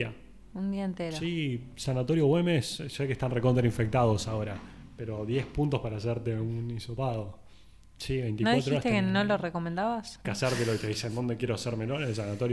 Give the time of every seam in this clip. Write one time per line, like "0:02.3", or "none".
0:08.0
0:10.2